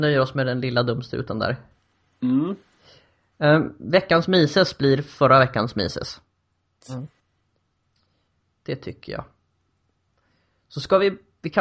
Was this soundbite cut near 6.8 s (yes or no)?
yes